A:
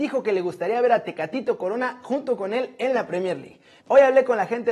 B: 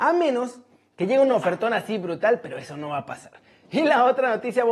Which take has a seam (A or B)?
A